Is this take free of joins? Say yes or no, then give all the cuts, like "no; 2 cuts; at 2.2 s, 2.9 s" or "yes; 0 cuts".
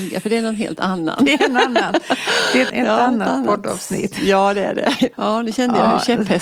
no; 2 cuts; at 2.7 s, 5.1 s